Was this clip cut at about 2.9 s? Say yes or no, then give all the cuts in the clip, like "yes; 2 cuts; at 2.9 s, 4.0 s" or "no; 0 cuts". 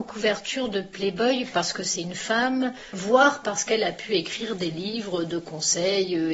yes; 1 cut; at 2.9 s